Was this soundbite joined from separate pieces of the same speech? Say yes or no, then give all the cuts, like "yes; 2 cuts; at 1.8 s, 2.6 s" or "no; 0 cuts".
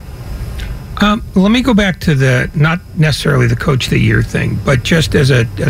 no; 0 cuts